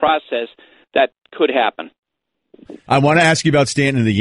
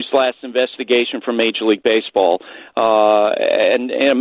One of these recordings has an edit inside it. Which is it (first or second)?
first